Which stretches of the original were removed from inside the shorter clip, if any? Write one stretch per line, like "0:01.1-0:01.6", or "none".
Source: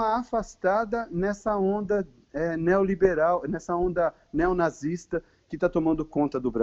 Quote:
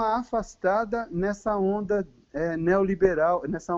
none